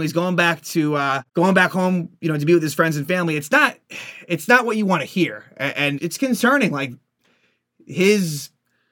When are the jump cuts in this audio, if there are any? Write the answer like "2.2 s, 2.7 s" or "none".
1.3 s, 6.0 s